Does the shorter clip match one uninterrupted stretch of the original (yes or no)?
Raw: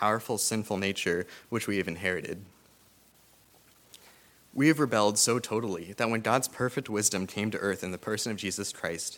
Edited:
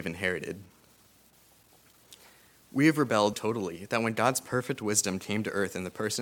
no